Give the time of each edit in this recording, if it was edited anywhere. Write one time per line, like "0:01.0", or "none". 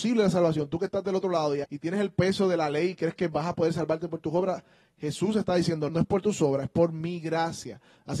0:01.6
0:05.9

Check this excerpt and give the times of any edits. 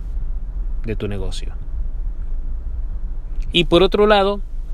0:03.5

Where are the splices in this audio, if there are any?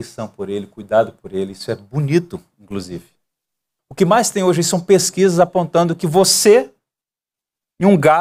0:03.8

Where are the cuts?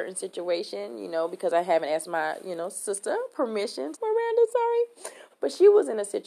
0:03.9
0:05.3

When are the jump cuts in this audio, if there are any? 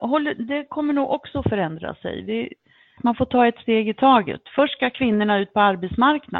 0:03.0

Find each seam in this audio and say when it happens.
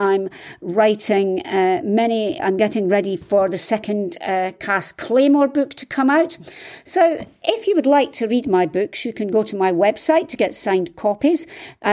0:02.4

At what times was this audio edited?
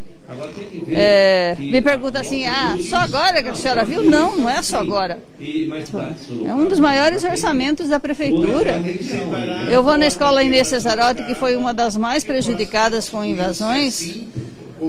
0:05.9

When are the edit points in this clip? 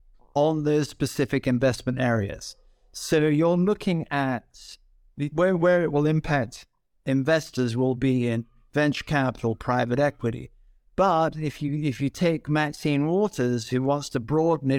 none

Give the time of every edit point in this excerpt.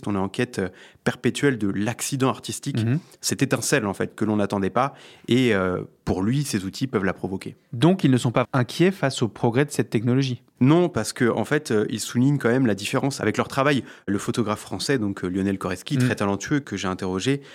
0:08.4

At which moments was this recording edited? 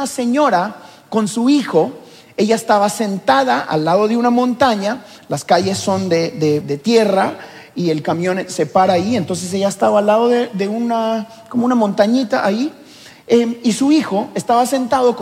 0:06.6

